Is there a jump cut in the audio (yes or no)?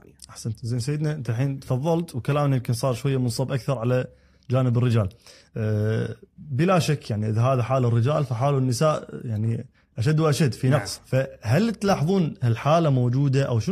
yes